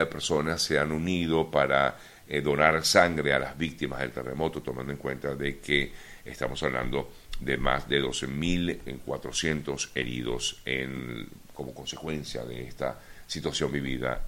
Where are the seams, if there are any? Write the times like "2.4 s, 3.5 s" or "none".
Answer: none